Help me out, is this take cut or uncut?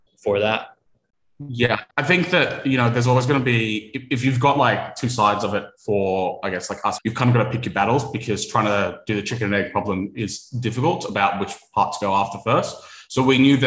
cut